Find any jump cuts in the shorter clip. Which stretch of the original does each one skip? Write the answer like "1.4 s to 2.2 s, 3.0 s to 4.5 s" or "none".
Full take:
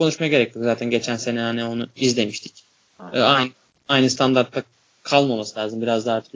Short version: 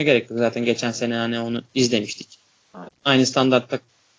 3.1 s to 3.7 s

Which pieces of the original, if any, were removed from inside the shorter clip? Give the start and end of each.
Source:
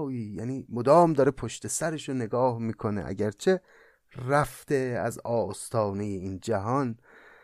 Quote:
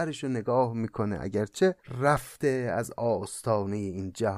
3.6 s to 4.1 s

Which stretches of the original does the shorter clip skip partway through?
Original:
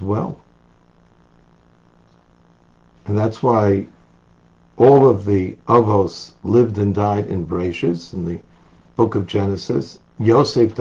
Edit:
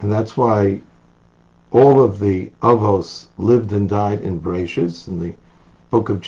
none

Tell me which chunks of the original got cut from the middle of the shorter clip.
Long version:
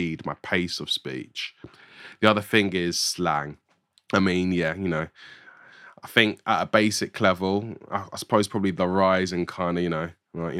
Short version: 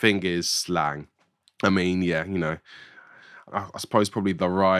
6.0 s to 7.9 s

